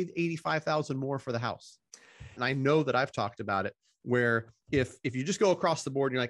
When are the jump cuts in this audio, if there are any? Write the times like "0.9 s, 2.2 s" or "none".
2.4 s